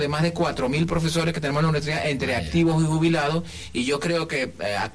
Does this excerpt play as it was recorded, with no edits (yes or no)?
yes